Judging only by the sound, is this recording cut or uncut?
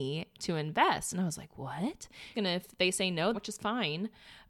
cut